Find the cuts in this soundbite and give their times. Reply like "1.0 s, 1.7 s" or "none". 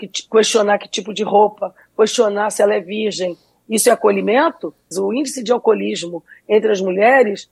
4.9 s

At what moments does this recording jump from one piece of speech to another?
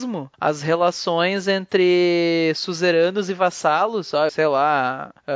4.3 s

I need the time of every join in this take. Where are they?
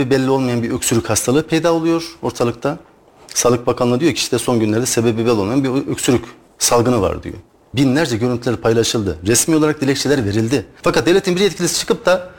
7.7 s, 10.8 s

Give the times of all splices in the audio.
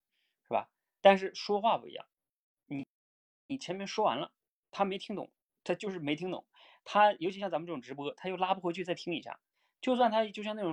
none

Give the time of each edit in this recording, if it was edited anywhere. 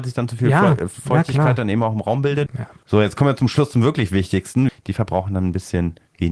2.5 s, 4.7 s

